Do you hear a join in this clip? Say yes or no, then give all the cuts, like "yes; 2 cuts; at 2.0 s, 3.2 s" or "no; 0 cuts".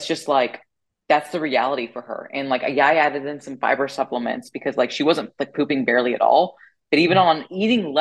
no; 0 cuts